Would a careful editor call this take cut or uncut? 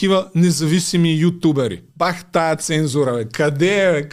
cut